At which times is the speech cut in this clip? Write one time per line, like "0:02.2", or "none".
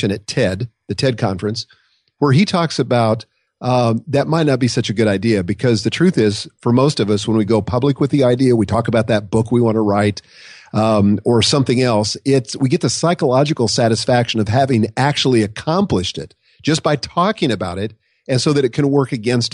none